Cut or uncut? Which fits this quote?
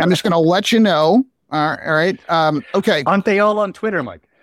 uncut